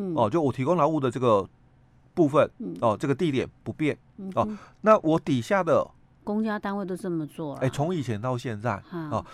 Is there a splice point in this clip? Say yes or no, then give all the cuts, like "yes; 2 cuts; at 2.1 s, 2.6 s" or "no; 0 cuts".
yes; 1 cut; at 6.0 s